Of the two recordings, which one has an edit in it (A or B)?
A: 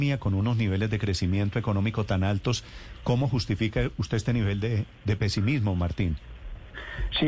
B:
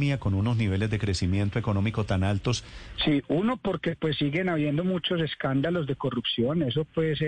B